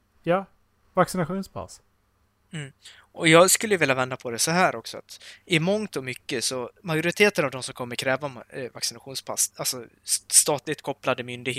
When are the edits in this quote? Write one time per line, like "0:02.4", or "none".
0:02.3
0:09.5